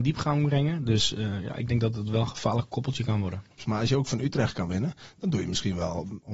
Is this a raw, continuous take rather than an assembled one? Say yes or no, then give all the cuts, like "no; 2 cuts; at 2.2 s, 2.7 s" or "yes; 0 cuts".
no; 1 cut; at 3.6 s